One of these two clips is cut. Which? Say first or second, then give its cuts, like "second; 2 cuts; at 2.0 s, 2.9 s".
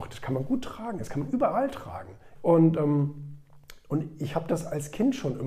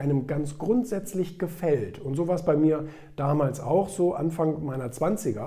first; 1 cut; at 2.4 s